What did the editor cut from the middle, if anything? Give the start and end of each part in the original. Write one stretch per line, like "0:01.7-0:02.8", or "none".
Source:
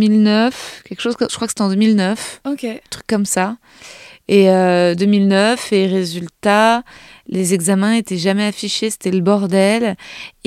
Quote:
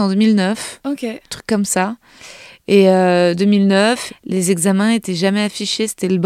0:05.7-0:07.1